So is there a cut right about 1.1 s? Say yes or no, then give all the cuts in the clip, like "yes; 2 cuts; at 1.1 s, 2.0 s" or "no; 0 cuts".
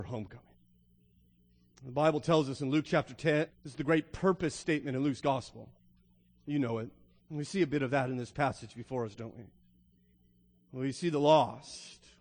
no; 2 cuts; at 3.5 s, 7.2 s